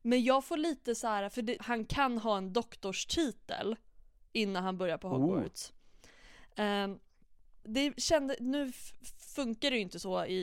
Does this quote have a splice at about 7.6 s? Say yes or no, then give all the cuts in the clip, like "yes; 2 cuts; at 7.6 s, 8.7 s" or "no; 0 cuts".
yes; 2 cuts; at 1.6 s, 7.6 s